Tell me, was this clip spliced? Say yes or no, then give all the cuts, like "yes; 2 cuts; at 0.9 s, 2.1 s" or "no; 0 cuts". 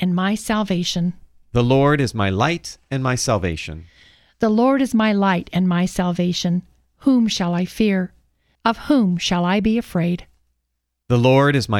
yes; 1 cut; at 8.6 s